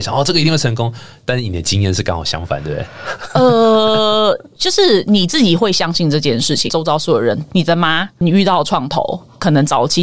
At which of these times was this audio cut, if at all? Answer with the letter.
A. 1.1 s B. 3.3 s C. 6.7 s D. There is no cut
C